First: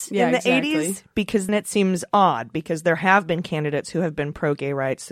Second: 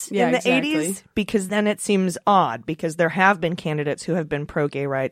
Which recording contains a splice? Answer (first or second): first